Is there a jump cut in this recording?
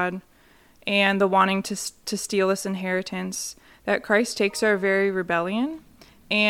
no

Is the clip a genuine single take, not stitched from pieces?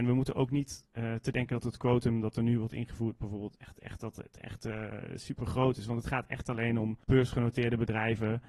no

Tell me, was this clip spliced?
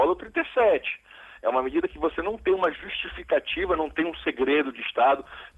no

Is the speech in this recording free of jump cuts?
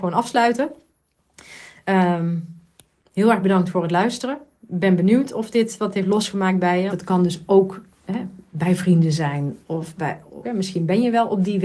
no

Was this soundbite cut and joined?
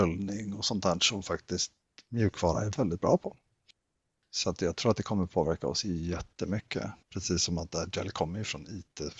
yes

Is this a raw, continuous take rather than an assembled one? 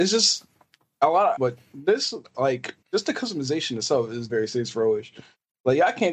no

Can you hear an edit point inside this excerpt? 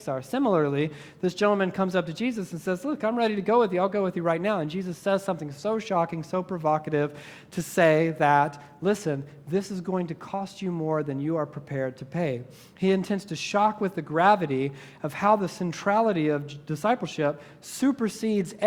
no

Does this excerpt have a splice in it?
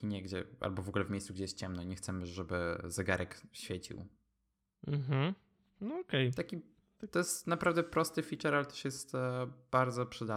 no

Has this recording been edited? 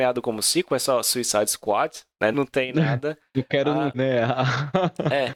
yes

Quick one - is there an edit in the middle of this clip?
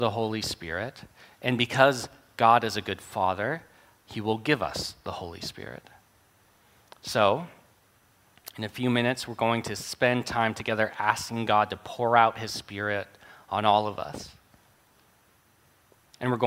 no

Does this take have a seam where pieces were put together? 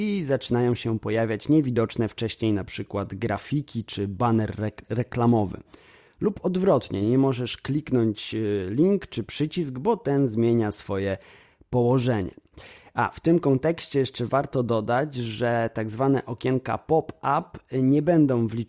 no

